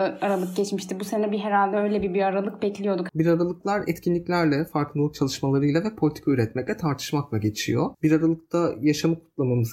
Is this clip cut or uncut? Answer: cut